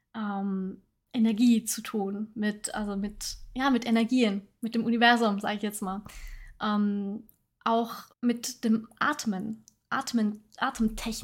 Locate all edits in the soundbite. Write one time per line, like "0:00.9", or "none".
0:08.1